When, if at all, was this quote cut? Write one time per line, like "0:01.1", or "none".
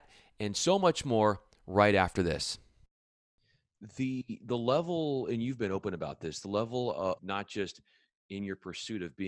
0:07.2